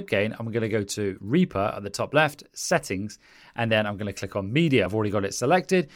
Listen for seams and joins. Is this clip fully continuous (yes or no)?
yes